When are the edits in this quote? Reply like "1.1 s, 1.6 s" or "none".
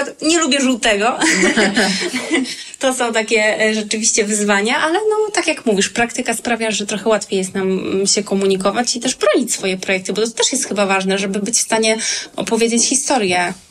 6.7 s